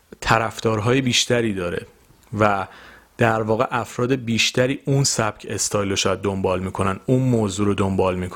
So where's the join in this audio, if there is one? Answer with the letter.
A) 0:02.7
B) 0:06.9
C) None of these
C